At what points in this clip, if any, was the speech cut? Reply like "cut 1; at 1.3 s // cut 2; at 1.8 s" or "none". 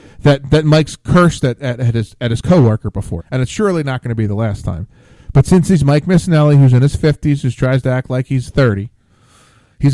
cut 1; at 3.2 s